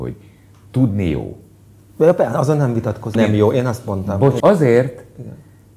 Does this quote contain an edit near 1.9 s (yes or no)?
no